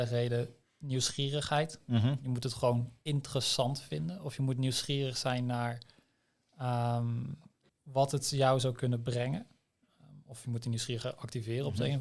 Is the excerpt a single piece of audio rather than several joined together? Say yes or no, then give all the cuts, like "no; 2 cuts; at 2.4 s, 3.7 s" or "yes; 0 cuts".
no; 1 cut; at 7.7 s